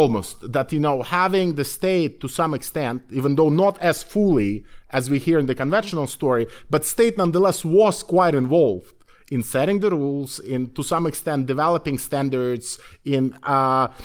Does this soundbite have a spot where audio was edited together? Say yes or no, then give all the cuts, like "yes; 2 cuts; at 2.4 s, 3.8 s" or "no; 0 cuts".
no; 0 cuts